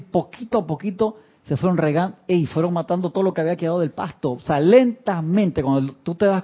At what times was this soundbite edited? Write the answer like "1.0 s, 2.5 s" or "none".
none